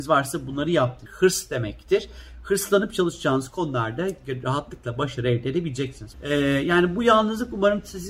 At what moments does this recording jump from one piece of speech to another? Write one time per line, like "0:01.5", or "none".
0:01.1
0:06.1